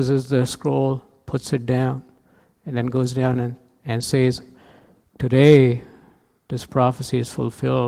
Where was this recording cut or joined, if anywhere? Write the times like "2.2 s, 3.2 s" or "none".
none